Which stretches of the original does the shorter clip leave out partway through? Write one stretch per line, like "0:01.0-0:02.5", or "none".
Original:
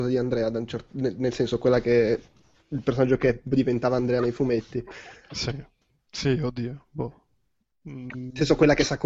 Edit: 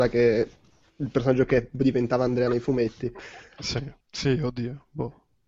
0:05.7-0:06.0